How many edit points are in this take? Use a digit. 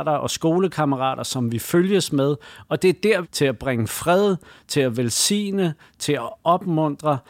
1